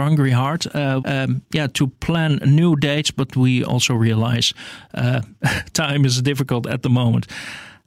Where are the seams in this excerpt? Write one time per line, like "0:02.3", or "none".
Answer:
0:01.0